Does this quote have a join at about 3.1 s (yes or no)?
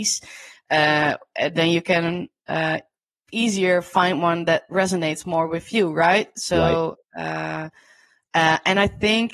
no